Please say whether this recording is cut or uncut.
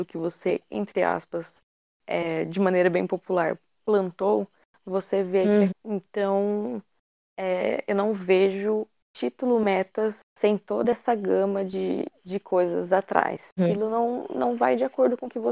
cut